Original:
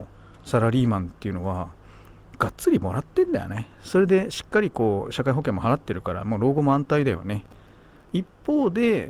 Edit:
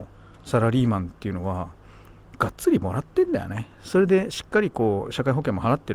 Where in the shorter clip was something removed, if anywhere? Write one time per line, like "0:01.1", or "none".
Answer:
none